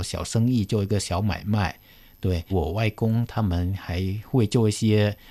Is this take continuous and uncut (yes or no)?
no